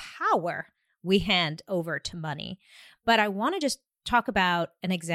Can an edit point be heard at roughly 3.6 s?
no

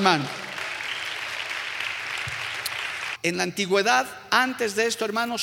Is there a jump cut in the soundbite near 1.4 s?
no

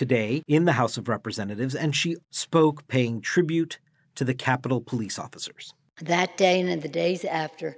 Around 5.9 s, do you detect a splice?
no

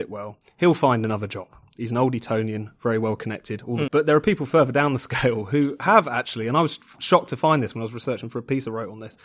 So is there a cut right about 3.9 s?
yes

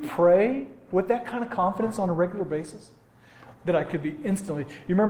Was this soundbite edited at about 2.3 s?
no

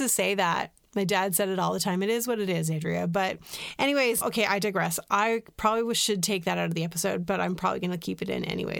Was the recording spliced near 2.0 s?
no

